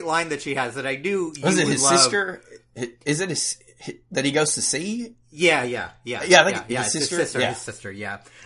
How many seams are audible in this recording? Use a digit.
0